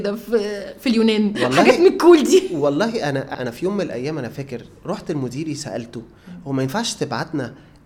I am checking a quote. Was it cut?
yes; 1 cut; at 3.3 s

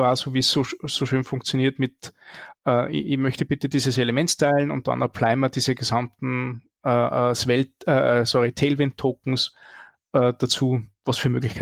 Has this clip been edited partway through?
no; 0 cuts

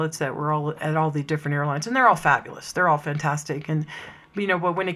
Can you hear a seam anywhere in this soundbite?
no; 0 cuts

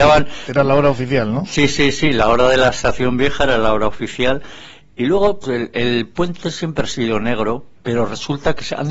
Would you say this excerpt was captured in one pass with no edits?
no; 2 cuts; at 5.4 s, 7.7 s

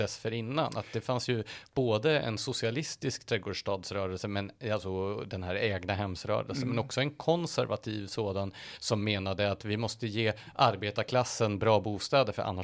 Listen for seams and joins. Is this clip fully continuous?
yes; 0 cuts

